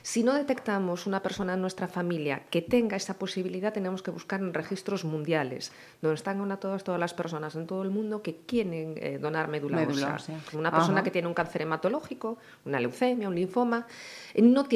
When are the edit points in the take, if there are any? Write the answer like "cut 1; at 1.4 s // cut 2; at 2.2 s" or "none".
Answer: cut 1; at 10.5 s